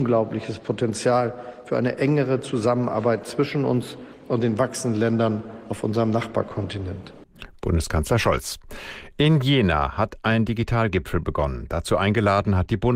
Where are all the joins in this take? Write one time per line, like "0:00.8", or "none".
none

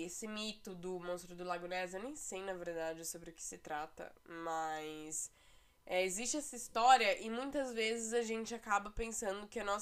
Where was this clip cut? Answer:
none

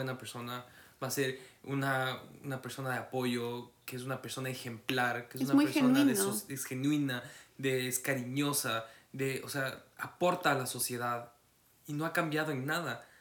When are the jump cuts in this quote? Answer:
none

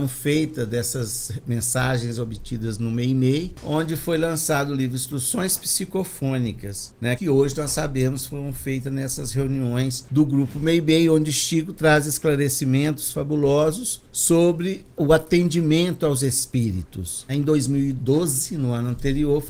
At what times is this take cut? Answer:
0:07.2
0:17.3

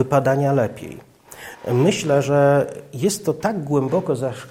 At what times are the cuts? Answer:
none

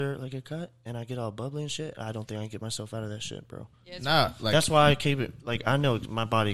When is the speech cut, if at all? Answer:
none

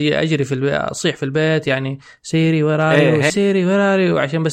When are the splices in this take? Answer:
0:03.3

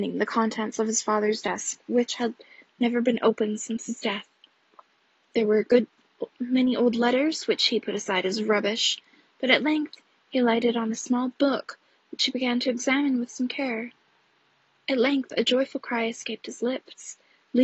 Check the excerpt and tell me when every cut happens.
none

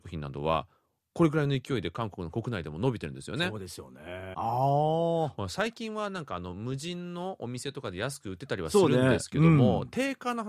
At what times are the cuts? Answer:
0:04.3

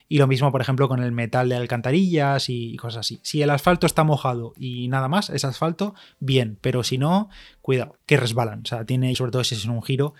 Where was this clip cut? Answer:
0:08.0
0:09.1

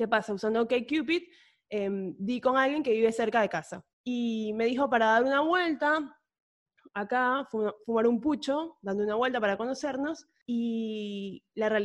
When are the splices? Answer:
0:03.9

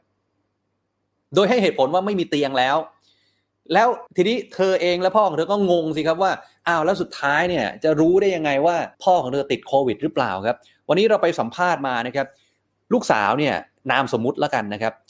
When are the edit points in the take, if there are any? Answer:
0:04.1
0:08.9

